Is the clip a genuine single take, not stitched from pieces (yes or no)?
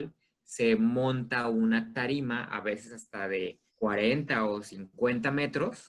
no